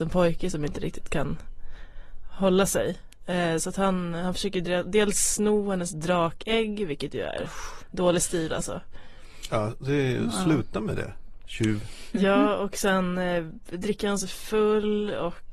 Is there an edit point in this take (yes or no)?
no